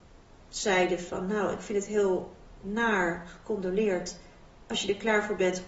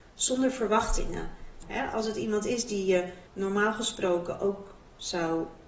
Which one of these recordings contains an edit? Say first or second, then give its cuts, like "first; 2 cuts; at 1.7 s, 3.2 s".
second; 2 cuts; at 1.6 s, 3.3 s